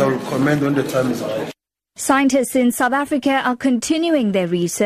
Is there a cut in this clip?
no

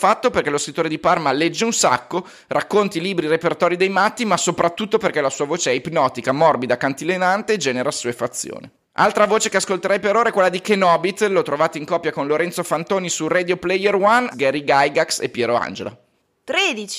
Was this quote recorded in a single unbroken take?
no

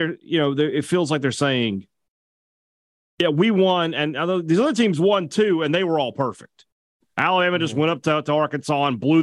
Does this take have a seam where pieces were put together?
no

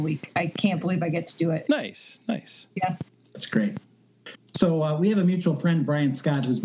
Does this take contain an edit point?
yes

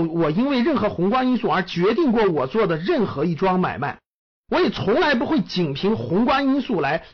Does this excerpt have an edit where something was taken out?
no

